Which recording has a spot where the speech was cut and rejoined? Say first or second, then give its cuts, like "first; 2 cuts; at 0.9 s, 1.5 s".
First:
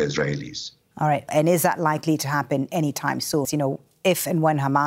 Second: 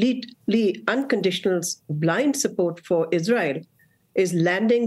first; 2 cuts; at 1.3 s, 3.4 s